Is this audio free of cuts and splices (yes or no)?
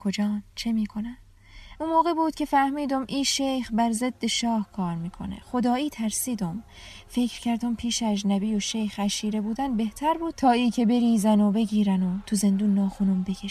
no